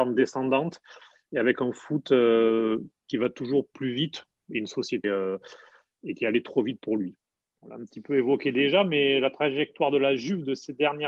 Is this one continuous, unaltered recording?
no; 2 cuts; at 5.0 s, 7.6 s

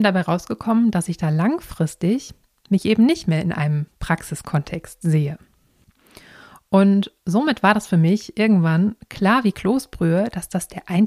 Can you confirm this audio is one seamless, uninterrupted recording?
yes; 0 cuts

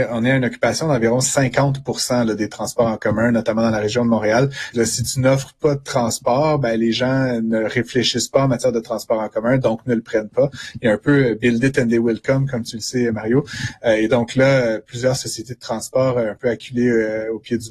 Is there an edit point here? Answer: yes; 1 cut; at 4.7 s

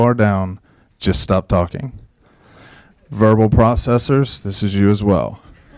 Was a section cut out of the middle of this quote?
no; 0 cuts

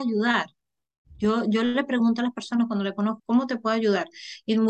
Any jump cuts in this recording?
yes; 1 cut; at 3.2 s

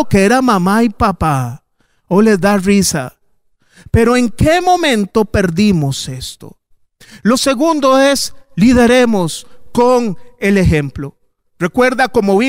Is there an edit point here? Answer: no; 0 cuts

